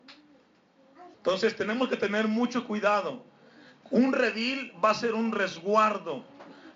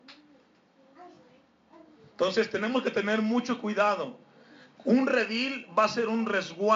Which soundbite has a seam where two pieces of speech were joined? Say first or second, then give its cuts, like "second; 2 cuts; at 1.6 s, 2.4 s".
first; 1 cut; at 1.1 s